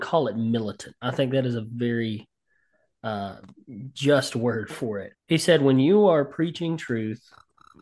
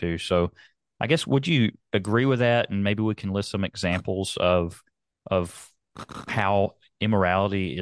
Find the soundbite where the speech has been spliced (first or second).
first